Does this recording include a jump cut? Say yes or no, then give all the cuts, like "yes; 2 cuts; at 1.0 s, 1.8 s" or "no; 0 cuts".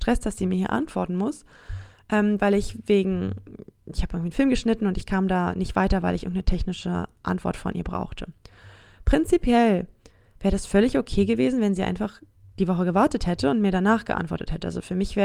no; 0 cuts